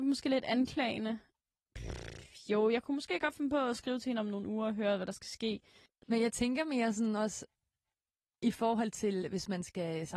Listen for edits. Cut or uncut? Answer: uncut